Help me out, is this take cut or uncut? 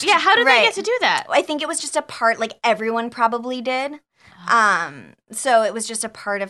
uncut